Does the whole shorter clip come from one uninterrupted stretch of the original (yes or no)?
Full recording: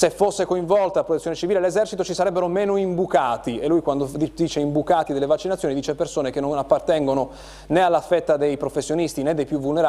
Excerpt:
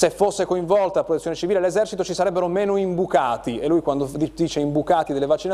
yes